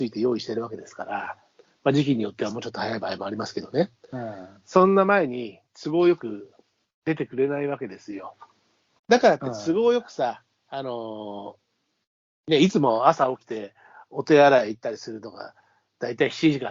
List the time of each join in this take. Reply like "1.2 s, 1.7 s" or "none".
9.0 s